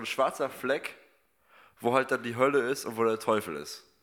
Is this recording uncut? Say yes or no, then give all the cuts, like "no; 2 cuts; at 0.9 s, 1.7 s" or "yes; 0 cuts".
yes; 0 cuts